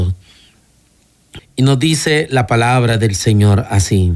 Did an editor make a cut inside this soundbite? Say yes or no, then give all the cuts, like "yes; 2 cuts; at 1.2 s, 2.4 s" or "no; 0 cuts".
yes; 1 cut; at 1.4 s